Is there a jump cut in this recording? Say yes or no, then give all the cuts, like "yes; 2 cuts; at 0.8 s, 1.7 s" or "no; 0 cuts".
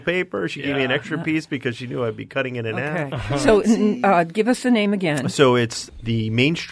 no; 0 cuts